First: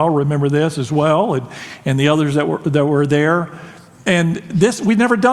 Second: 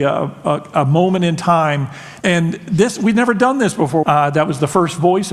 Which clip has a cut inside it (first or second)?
second